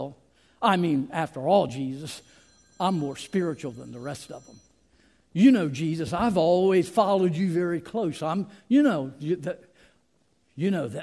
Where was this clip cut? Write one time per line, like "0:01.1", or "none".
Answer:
none